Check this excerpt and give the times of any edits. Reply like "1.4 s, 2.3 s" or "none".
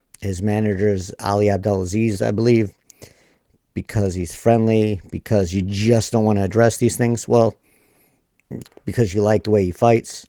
none